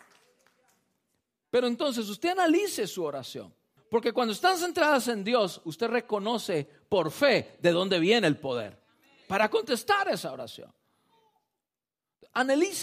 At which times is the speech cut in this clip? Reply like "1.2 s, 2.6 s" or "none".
3.8 s